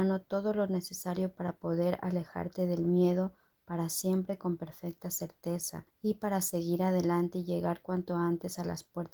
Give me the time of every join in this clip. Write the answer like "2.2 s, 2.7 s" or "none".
5.9 s